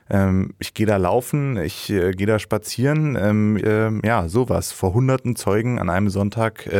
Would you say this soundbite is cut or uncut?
cut